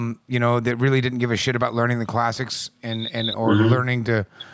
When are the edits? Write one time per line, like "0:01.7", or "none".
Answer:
none